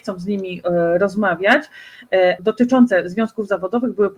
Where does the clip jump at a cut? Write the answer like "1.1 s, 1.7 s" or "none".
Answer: 2.4 s